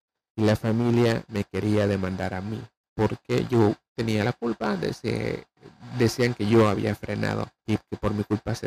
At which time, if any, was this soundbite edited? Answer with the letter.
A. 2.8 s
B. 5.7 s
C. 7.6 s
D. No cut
C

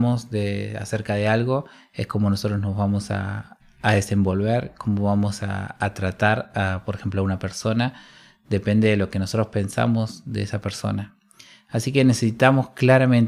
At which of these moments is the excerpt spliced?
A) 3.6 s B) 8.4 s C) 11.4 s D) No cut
A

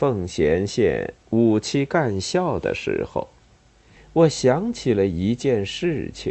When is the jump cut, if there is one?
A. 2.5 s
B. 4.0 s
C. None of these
B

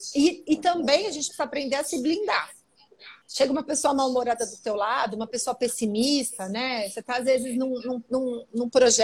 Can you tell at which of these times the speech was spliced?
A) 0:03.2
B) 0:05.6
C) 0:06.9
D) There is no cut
A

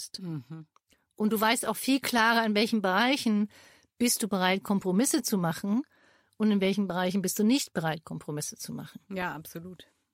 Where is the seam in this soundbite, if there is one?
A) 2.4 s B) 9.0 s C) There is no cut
C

